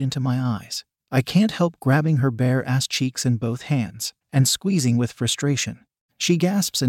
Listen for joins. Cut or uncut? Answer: cut